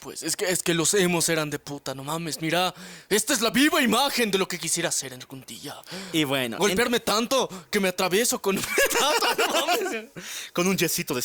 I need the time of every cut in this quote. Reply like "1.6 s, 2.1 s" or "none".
none